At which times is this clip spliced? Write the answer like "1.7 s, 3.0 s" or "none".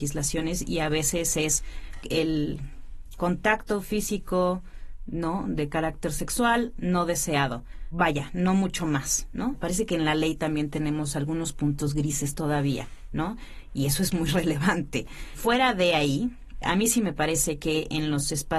2.0 s, 16.6 s